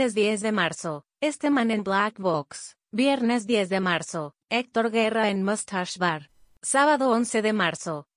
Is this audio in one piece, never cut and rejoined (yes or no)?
yes